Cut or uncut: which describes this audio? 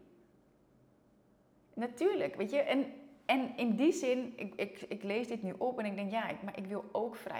uncut